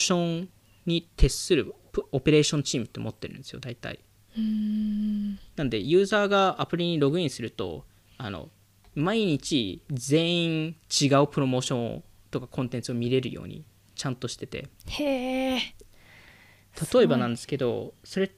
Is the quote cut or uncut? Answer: cut